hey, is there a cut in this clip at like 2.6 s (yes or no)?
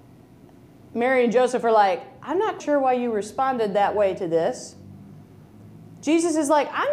yes